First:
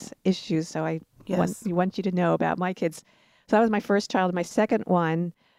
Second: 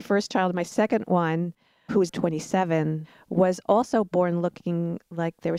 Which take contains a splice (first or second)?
second